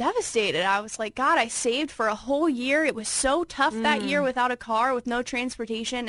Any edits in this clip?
no; 0 cuts

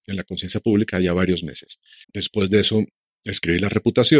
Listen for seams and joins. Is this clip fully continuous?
no; 1 cut; at 2.0 s

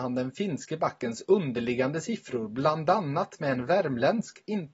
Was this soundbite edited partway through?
no; 0 cuts

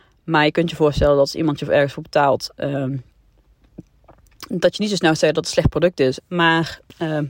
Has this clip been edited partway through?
yes; 2 cuts; at 2.5 s, 6.2 s

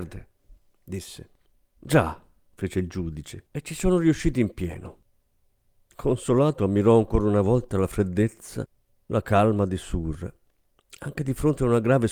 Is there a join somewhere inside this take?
yes; 1 cut; at 3.5 s

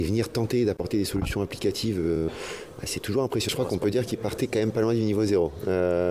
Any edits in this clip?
yes; 1 cut; at 2.3 s

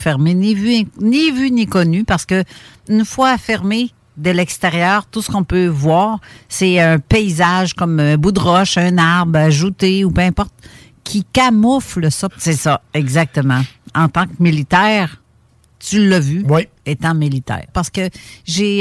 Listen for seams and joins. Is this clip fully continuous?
no; 2 cuts; at 12.3 s, 17.7 s

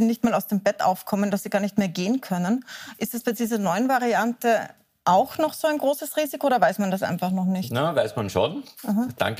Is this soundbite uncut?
yes; 0 cuts

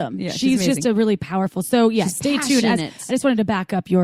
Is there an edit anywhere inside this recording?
no; 0 cuts

